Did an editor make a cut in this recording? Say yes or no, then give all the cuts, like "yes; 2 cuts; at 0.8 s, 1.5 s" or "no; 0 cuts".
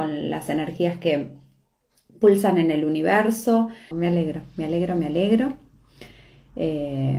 yes; 1 cut; at 3.9 s